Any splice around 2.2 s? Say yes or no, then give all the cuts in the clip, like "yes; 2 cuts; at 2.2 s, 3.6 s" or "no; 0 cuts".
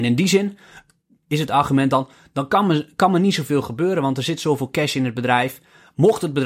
no; 0 cuts